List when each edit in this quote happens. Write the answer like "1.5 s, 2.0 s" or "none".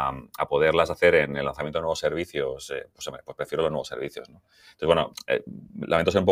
none